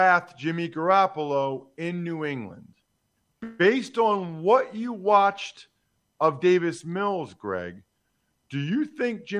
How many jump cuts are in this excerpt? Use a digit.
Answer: 0